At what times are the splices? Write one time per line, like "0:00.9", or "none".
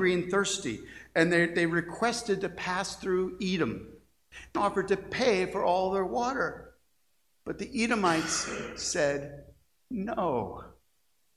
0:04.5